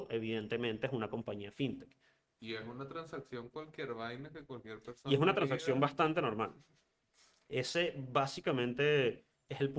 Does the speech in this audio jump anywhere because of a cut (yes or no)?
no